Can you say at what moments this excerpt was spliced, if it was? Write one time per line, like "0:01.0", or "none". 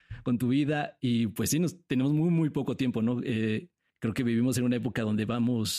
none